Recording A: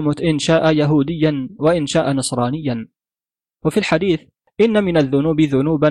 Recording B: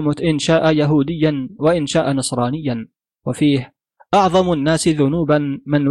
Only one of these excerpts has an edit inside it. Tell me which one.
B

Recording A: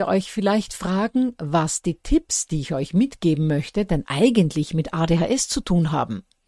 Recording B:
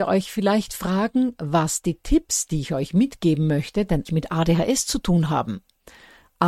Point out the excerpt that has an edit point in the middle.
B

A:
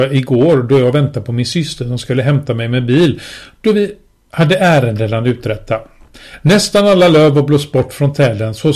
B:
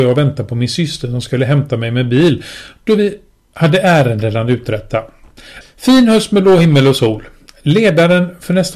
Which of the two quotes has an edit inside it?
B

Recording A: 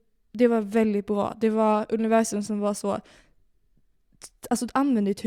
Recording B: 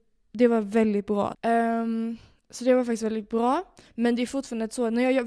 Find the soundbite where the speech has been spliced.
B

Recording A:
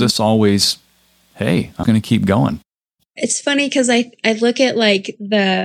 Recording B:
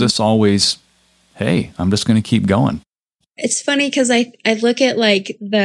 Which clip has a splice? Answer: A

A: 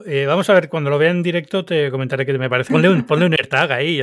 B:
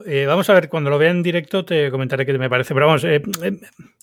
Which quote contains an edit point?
A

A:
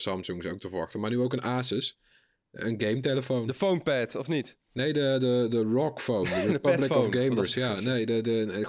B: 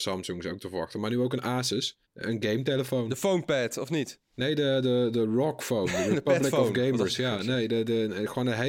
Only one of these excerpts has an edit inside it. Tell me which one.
B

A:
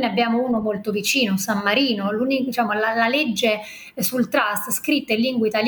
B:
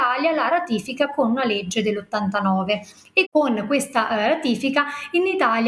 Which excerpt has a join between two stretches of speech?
B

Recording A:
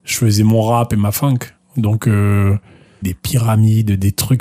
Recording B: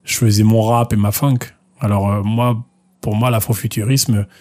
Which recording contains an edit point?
A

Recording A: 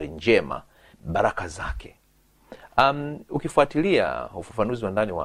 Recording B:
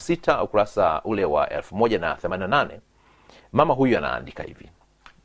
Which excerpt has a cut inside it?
A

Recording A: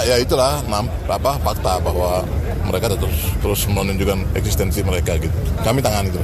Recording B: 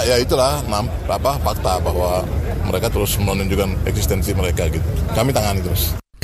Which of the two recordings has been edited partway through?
B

